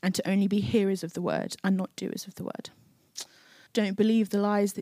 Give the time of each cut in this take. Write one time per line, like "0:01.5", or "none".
0:03.7